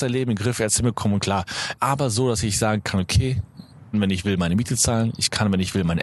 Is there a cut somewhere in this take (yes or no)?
yes